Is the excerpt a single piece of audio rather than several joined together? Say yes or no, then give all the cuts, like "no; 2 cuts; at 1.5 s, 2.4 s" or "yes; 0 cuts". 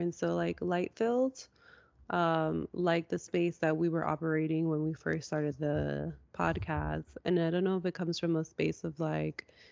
yes; 0 cuts